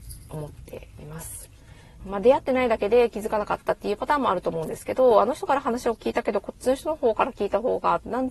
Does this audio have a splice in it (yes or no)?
yes